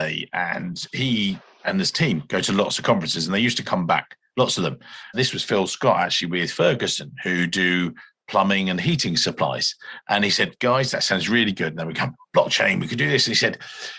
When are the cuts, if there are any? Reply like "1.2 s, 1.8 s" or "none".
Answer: 5.1 s